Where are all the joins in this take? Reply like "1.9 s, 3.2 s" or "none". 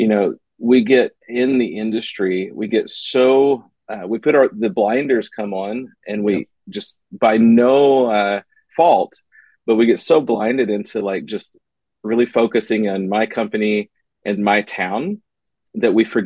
8.7 s, 14.4 s

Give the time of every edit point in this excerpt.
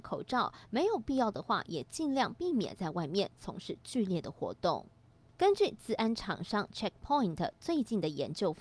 none

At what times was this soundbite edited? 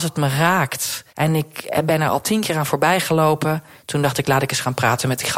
1.1 s

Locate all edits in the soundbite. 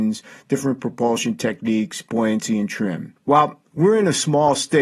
3.2 s

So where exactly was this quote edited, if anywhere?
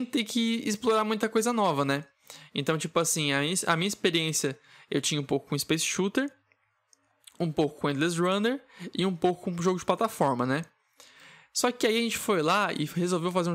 none

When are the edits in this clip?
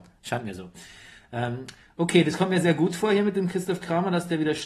none

